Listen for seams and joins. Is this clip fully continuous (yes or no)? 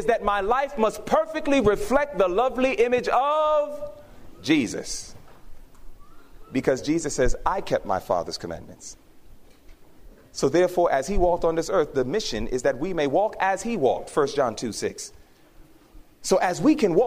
yes